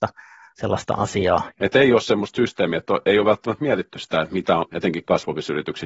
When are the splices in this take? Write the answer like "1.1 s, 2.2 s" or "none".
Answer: 1.5 s, 4.7 s